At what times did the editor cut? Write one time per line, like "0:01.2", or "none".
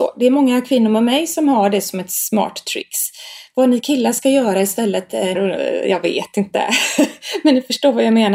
0:05.3